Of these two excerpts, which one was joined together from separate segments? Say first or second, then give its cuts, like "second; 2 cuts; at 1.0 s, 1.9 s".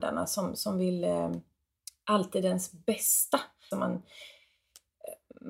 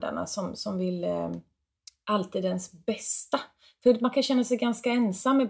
first; 1 cut; at 3.7 s